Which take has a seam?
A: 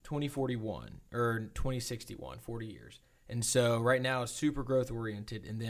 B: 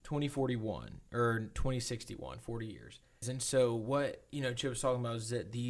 B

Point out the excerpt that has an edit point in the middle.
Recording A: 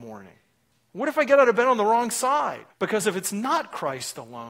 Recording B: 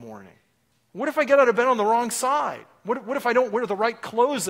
A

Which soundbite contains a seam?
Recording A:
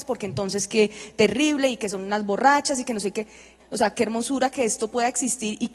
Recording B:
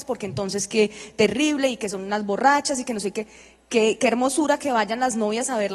A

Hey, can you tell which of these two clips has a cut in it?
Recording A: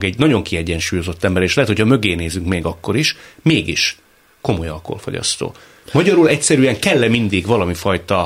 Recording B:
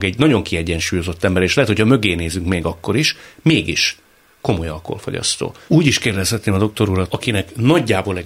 B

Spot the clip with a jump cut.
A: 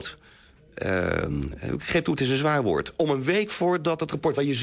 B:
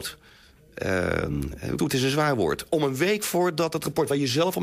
B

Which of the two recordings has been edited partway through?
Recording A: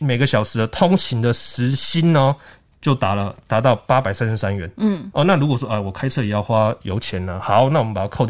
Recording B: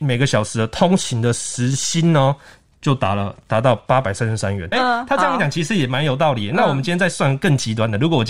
B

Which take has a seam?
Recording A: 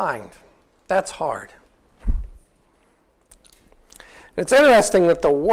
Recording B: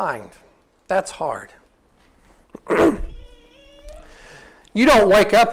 A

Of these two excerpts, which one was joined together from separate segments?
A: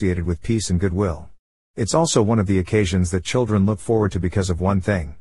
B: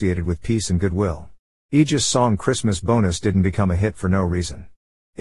B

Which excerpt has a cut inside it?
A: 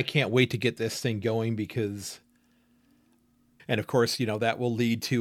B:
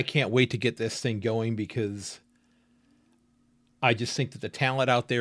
A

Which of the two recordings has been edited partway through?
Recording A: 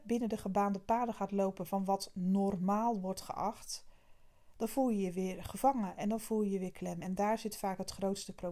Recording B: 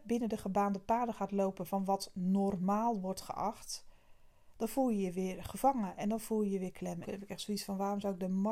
B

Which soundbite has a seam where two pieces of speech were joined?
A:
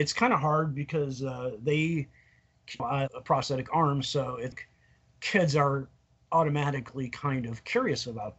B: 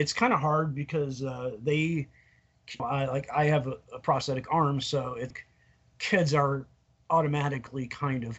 A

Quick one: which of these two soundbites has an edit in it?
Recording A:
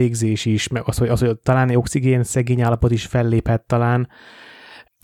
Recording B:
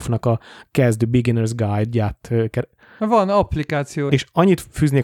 B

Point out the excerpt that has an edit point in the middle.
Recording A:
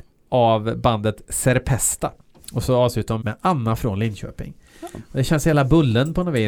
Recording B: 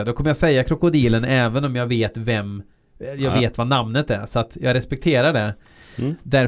A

